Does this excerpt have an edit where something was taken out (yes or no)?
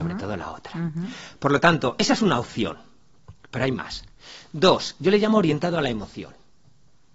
no